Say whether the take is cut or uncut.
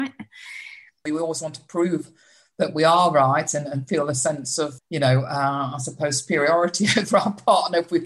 cut